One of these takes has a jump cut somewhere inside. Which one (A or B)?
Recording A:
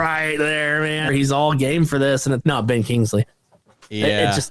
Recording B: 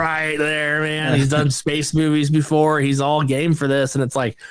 A